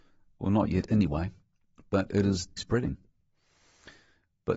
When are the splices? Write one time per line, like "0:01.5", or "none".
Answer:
0:02.6